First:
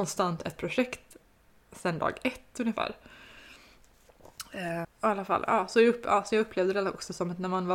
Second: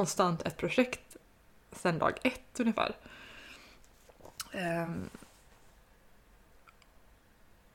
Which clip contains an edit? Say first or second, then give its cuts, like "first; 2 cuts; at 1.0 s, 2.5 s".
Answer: first; 1 cut; at 4.8 s